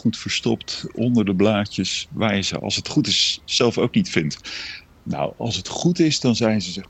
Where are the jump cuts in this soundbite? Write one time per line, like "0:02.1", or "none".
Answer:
0:04.9